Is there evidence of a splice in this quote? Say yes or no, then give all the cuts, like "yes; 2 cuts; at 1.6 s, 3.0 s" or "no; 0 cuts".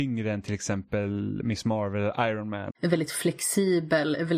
yes; 2 cuts; at 1.4 s, 2.7 s